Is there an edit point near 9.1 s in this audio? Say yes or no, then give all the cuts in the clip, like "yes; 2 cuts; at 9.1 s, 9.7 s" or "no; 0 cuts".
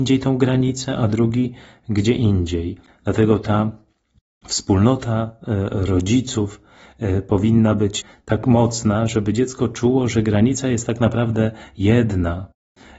no; 1 cut; at 2.9 s